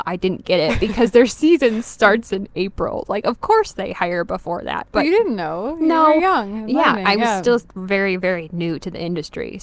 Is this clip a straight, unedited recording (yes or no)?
yes